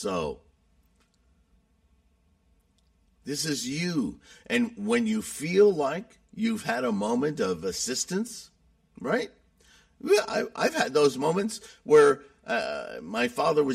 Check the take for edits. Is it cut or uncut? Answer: uncut